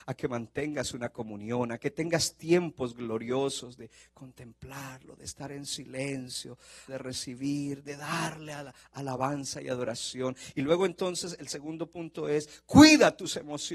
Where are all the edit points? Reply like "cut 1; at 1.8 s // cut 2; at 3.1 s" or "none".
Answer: cut 1; at 6.9 s

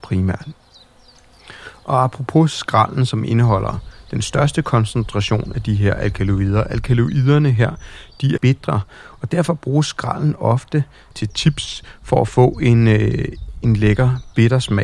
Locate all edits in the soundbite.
cut 1; at 8.4 s // cut 2; at 11.1 s

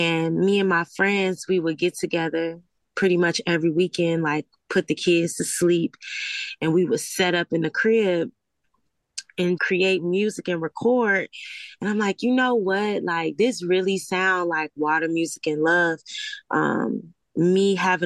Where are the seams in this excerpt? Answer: cut 1; at 9.6 s

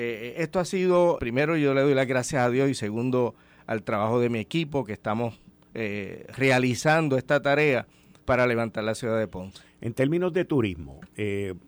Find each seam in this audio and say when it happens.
cut 1; at 1.2 s

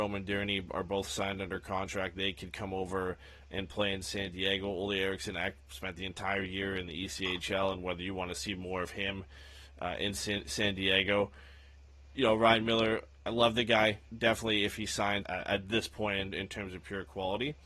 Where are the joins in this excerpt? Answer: cut 1; at 14.1 s // cut 2; at 15.2 s

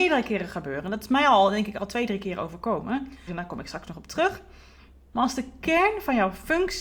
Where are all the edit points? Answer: cut 1; at 3.3 s // cut 2; at 5.1 s

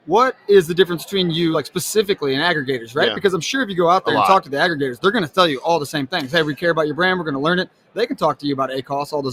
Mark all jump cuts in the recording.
none

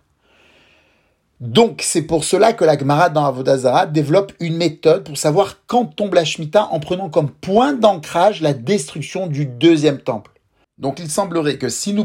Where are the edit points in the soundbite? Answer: cut 1; at 10.6 s

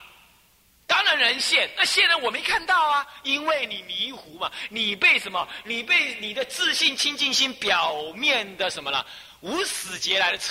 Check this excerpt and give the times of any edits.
none

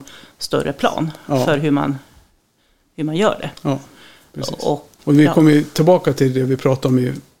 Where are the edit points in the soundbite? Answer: cut 1; at 5.0 s

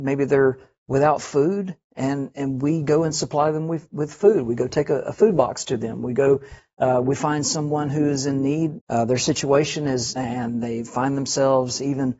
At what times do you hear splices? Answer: cut 1; at 8.8 s // cut 2; at 10.2 s

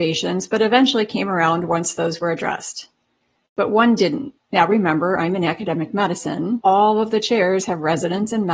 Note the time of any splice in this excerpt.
cut 1; at 4.4 s // cut 2; at 6.6 s

